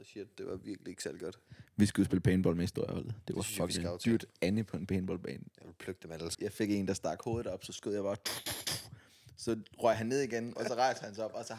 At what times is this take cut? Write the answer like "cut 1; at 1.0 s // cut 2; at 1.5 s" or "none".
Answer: cut 1; at 6.3 s // cut 2; at 10.6 s